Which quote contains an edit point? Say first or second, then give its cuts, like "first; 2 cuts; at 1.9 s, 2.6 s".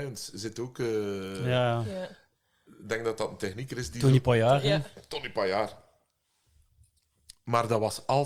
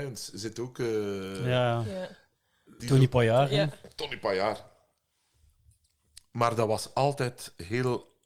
second; 1 cut; at 2.8 s